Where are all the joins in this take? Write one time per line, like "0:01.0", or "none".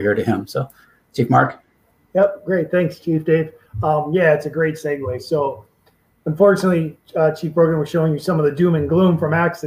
none